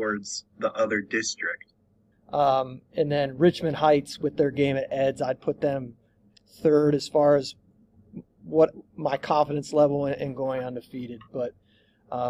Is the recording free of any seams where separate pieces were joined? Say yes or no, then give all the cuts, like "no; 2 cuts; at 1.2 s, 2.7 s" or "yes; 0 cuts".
no; 1 cut; at 2.1 s